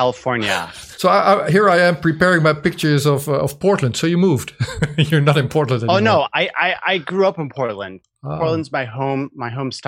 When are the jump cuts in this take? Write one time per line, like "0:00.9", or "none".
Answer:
0:00.9